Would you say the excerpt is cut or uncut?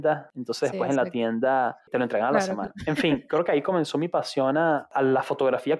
uncut